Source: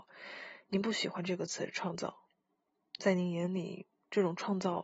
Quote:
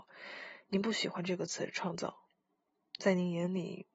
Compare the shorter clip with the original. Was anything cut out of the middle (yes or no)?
no